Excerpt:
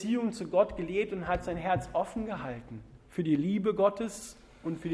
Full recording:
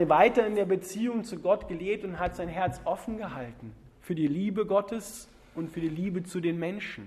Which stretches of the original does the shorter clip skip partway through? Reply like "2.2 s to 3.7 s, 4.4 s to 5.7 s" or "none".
none